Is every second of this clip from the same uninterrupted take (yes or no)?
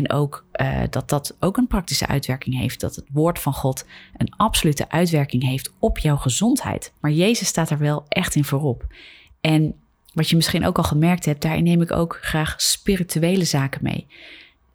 no